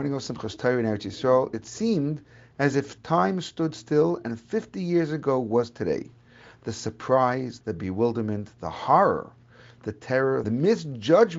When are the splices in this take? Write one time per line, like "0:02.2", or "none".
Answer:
0:07.6
0:10.4